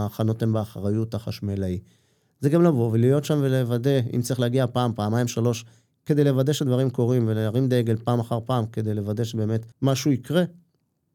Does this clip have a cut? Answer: yes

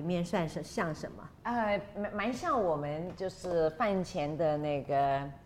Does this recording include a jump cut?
no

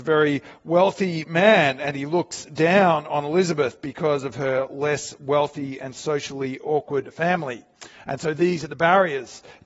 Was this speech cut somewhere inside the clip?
no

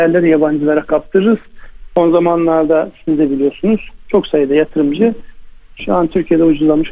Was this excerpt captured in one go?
yes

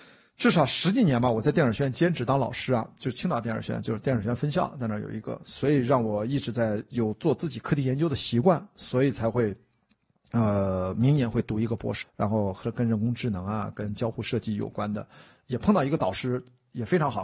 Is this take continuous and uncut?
no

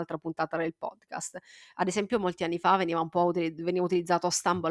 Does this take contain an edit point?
yes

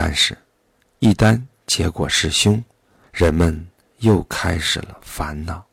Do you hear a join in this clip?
yes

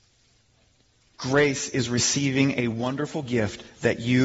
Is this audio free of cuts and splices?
no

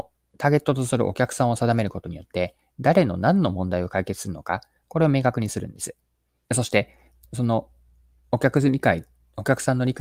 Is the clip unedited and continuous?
no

